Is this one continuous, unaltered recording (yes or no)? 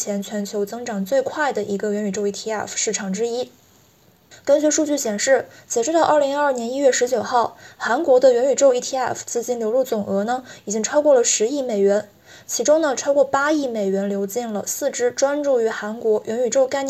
no